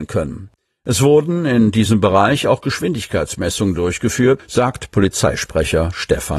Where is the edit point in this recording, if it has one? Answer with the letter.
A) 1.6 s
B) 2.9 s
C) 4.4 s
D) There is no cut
C